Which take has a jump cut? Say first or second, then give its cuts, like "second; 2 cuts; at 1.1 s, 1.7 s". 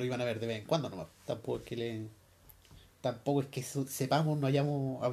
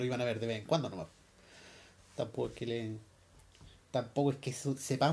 first; 1 cut; at 1.1 s